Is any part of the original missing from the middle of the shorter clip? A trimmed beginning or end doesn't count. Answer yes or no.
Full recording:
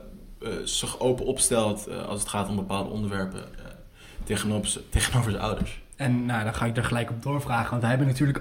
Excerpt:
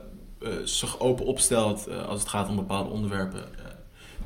no